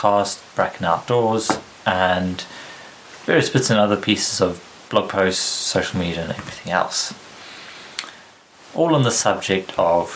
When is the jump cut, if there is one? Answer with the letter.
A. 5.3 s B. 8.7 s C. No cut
C